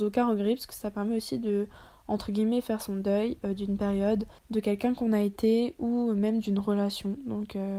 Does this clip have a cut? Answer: yes; 1 cut; at 4.4 s

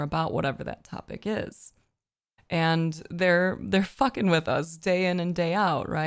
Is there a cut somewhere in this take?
yes; 1 cut; at 2.4 s

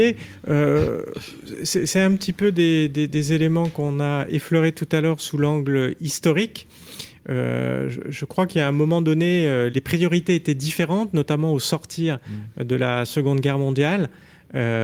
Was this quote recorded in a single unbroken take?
no; 1 cut; at 9.7 s

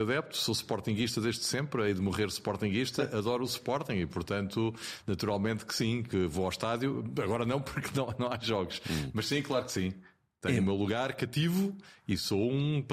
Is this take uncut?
yes; 0 cuts

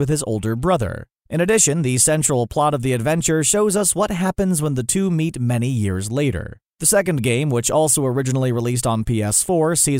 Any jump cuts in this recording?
no; 0 cuts

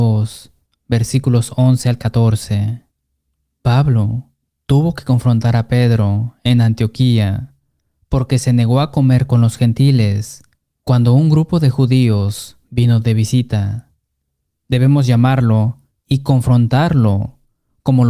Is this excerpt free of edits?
no; 2 cuts; at 3.5 s, 14.5 s

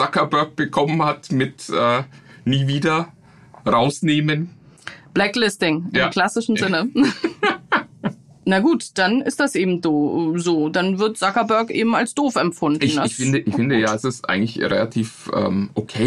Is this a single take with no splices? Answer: yes; 0 cuts

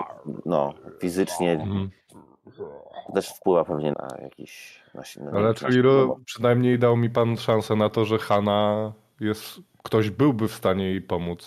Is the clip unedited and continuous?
no; 1 cut; at 3.9 s

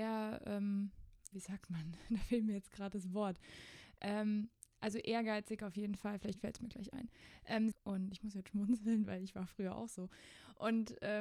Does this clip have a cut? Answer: yes; 2 cuts; at 1.3 s, 7.7 s

